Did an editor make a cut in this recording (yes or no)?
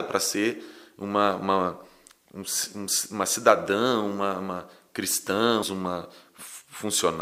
yes